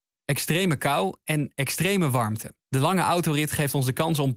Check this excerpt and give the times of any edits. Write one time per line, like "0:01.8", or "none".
0:02.6